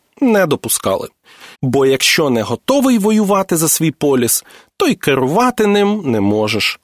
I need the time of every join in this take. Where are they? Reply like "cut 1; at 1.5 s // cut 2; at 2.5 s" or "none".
cut 1; at 1.5 s